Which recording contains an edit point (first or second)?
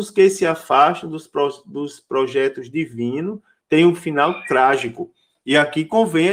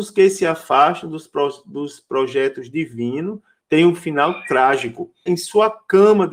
second